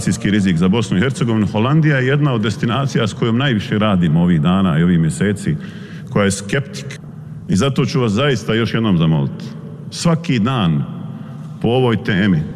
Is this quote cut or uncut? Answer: uncut